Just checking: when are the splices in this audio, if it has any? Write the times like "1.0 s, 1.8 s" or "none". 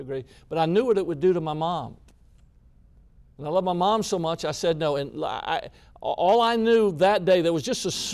none